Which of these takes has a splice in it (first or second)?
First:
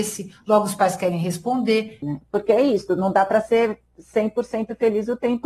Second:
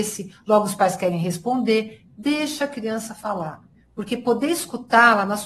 first